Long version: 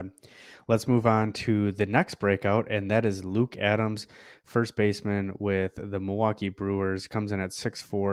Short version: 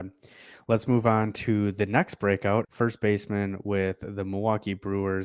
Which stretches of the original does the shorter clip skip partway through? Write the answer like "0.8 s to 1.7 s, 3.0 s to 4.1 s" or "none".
2.6 s to 4.4 s